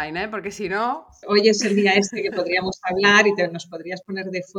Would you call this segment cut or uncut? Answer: cut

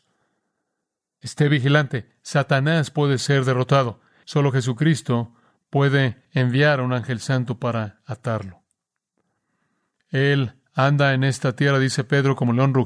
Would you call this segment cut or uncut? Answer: cut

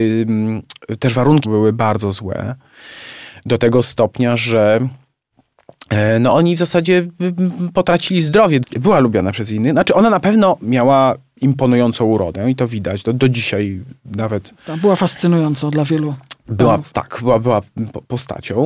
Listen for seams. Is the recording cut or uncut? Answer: cut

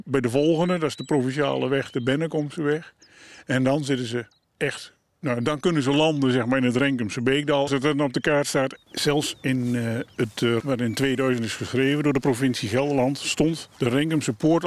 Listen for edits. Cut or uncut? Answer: cut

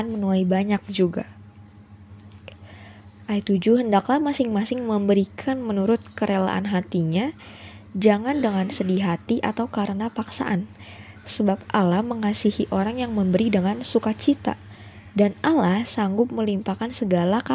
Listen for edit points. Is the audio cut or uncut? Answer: uncut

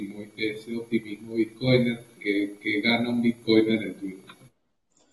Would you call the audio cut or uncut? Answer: cut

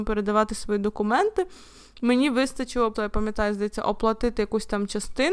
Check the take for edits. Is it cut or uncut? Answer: cut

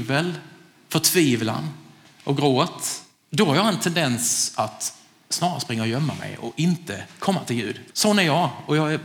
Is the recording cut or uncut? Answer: cut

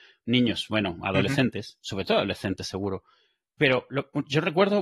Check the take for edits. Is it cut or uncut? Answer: uncut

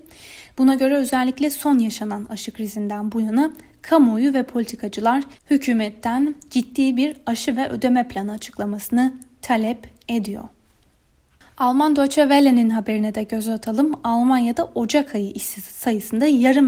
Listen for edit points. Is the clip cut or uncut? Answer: uncut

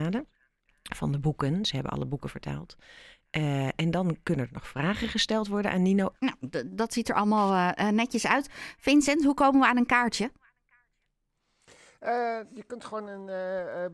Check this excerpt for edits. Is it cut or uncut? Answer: cut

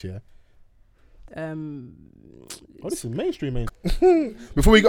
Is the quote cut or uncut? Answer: cut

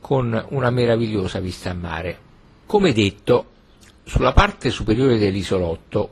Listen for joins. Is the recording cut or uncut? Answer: uncut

